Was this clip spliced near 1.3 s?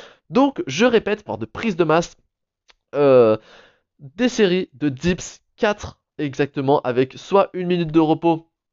yes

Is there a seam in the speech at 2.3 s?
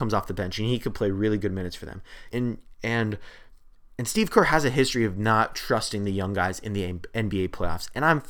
yes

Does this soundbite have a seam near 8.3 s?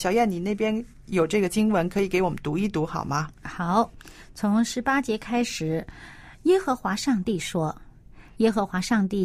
yes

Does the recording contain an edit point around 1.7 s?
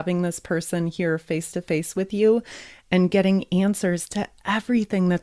no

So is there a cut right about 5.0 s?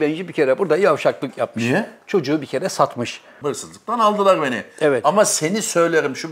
no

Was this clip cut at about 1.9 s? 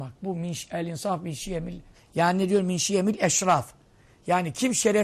yes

